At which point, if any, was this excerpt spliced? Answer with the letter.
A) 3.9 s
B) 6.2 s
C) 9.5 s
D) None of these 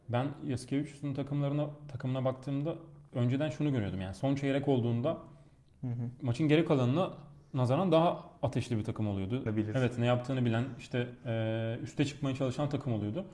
C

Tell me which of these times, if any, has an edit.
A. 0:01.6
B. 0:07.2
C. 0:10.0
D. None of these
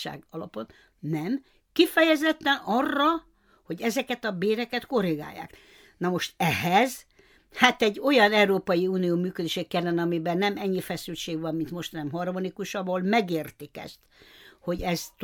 D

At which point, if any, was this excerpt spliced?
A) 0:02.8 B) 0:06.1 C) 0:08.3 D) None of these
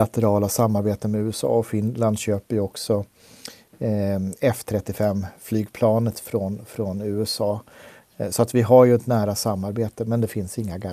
D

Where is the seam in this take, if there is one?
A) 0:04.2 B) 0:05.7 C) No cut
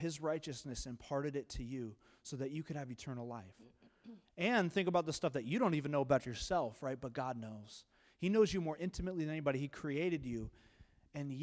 A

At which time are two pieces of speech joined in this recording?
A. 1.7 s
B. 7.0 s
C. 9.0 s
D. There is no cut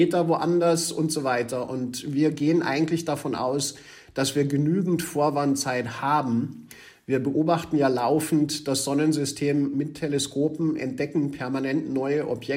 D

